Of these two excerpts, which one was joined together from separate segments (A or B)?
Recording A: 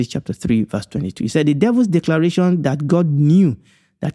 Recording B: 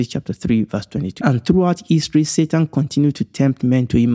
B